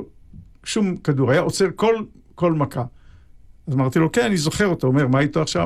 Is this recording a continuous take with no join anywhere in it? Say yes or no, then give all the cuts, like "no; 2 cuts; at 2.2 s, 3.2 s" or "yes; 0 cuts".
yes; 0 cuts